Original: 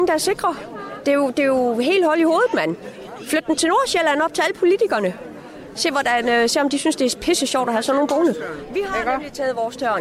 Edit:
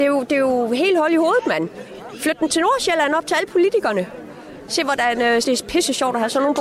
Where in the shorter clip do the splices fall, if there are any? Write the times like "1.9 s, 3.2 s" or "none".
5.4 s

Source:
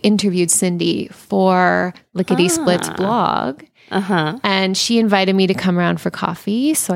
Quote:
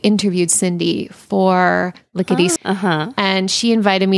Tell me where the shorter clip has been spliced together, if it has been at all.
2.6 s

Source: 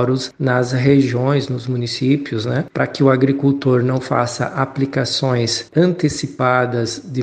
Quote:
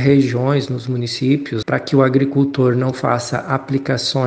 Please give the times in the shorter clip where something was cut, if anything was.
1.6 s

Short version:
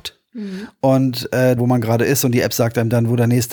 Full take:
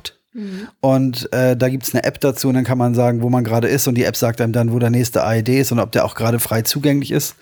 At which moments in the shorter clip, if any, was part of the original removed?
1.6 s

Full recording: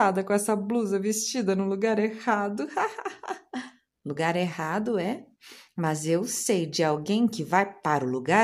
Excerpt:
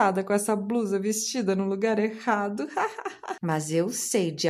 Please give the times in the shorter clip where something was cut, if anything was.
3.4 s

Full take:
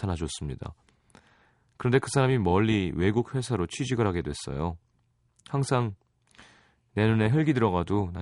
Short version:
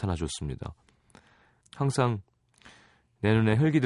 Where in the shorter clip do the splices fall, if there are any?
1.6 s

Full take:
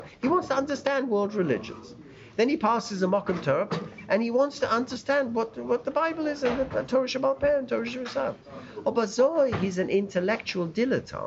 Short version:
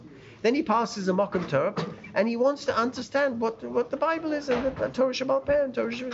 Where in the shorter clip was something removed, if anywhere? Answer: none

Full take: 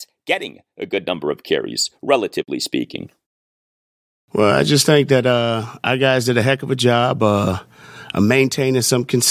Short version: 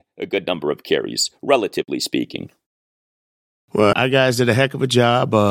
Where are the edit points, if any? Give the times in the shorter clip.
3.9 s

